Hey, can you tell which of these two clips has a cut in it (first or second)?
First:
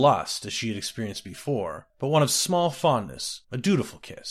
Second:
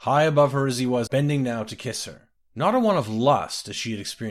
second